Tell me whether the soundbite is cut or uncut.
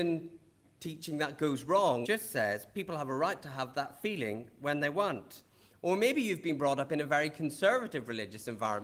cut